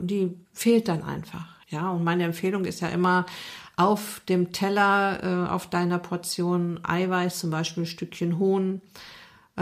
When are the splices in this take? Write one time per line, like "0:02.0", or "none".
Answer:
0:01.6